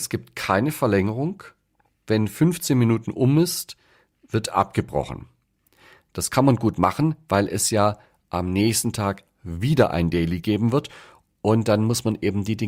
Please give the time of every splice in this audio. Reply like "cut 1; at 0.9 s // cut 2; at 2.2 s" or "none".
none